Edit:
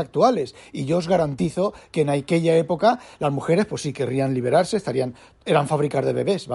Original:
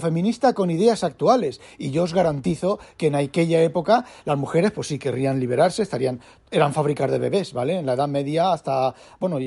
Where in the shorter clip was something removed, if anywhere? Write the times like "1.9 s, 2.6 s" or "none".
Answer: none